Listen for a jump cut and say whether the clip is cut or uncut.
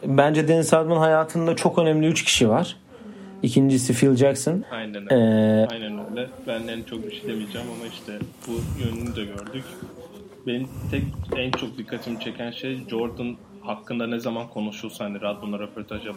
cut